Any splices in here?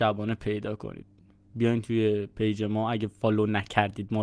no; 0 cuts

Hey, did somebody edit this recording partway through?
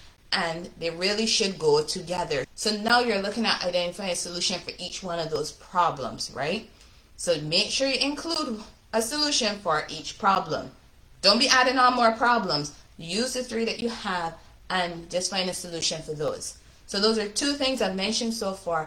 yes; 1 cut; at 2.4 s

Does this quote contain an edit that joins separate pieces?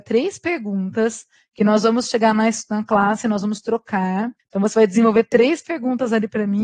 yes; 1 cut; at 4.4 s

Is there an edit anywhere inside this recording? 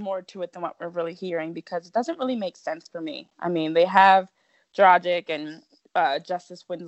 no; 0 cuts

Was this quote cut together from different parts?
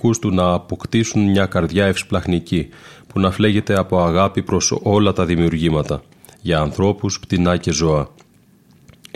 no; 0 cuts

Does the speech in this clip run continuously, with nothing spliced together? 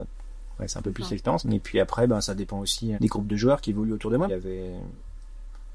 no; 3 cuts; at 1.4 s, 2.9 s, 4.3 s

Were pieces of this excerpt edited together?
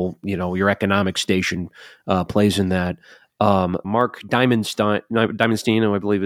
yes; 1 cut; at 3.8 s

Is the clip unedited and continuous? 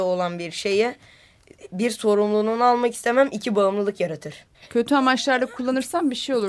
no; 1 cut; at 4.5 s

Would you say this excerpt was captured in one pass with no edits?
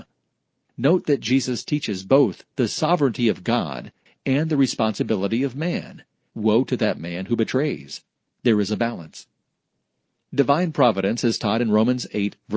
no; 1 cut; at 4.1 s

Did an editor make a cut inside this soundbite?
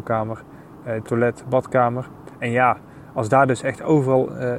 yes; 2 cuts; at 1.0 s, 2.3 s

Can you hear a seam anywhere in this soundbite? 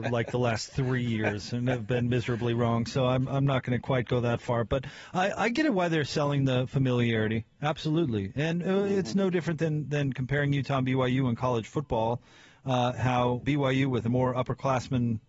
yes; 1 cut; at 13.4 s

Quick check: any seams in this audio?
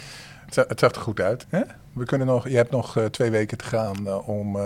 yes; 1 cut; at 1.4 s

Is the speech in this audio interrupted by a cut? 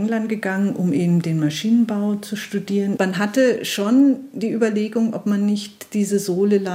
yes; 1 cut; at 3.0 s

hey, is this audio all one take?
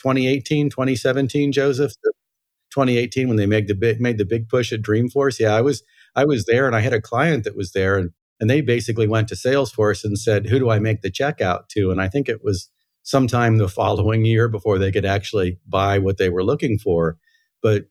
yes; 0 cuts

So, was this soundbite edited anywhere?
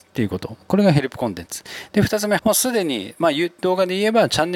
yes; 1 cut; at 2.4 s

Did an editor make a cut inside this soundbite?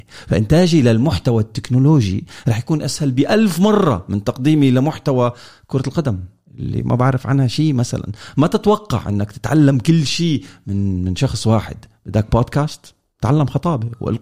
no; 0 cuts

